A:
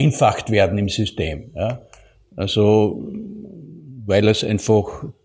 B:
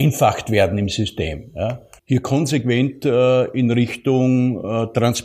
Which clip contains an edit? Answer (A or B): B